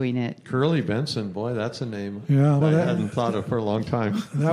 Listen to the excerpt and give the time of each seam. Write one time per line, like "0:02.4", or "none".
0:02.6